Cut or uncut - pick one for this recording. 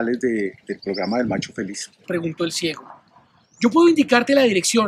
cut